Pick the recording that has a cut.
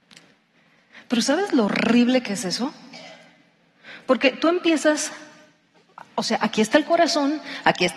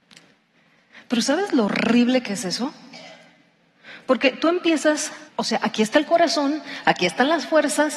second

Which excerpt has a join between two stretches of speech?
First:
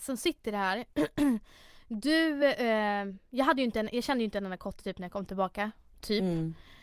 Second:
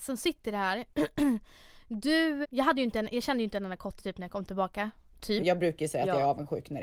second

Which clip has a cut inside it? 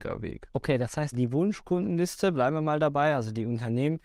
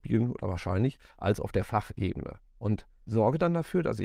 first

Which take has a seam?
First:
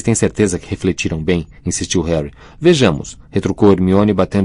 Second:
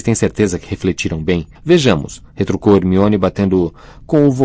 second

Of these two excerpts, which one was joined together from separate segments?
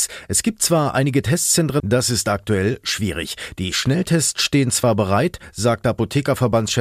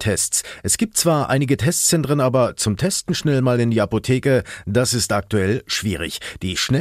first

